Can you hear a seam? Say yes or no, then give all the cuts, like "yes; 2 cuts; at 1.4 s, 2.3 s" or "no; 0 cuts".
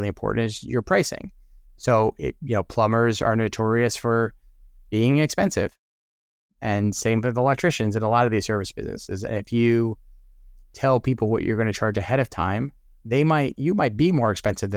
no; 0 cuts